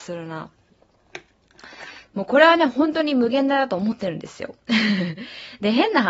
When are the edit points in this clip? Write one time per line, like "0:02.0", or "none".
0:02.1